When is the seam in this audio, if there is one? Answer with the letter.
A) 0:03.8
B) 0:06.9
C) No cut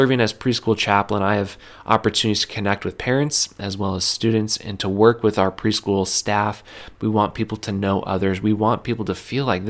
B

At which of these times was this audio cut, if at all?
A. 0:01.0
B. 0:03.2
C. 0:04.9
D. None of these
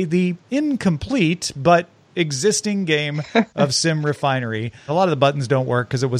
C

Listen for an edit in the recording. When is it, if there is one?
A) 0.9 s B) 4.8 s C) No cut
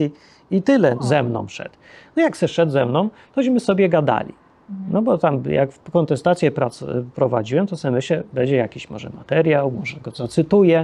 A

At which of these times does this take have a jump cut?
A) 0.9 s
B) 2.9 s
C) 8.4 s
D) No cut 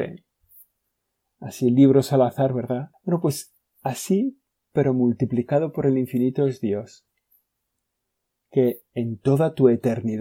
B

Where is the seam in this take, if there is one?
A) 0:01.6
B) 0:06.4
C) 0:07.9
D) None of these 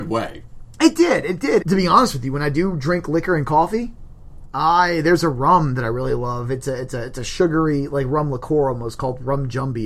A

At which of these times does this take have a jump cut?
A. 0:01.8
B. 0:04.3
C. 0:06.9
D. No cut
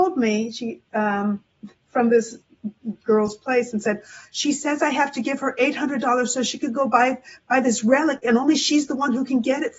D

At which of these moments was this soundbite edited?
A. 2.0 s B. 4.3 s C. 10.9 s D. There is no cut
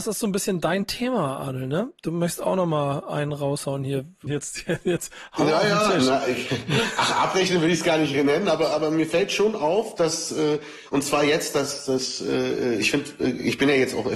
B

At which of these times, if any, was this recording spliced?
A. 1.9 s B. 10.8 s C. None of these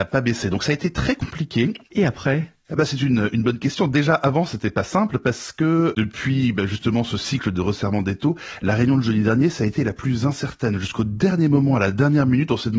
A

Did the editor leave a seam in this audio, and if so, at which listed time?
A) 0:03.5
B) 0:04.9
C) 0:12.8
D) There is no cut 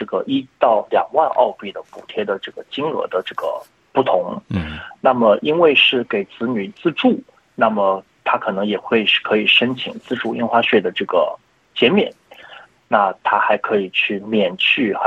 C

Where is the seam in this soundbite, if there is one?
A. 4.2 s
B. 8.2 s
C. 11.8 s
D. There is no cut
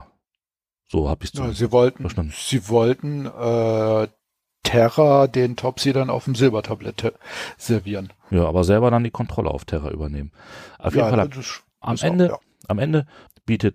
C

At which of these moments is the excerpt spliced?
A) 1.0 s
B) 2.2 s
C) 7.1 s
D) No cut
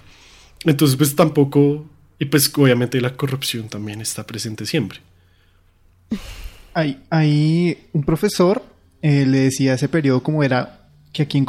D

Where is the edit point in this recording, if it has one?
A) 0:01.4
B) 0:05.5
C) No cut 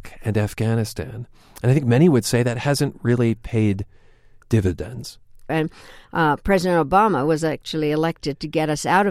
B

